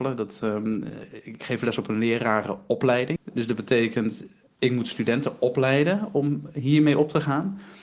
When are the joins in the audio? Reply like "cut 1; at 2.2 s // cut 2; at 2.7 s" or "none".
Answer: cut 1; at 3.2 s